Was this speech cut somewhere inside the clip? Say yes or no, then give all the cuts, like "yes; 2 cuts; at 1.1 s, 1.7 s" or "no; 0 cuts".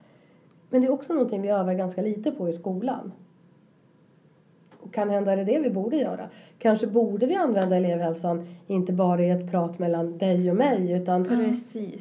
no; 0 cuts